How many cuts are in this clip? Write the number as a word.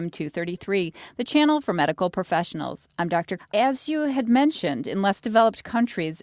one